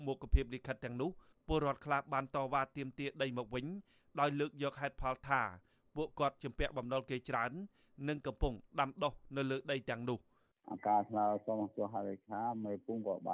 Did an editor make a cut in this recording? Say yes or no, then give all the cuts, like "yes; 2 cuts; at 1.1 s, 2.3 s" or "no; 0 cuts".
no; 0 cuts